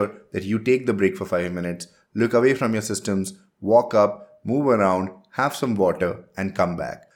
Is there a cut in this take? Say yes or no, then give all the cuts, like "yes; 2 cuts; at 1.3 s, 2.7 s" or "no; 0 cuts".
no; 0 cuts